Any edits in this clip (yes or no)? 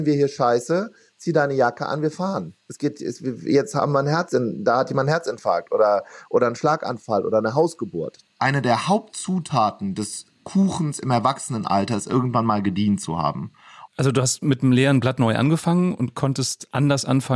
yes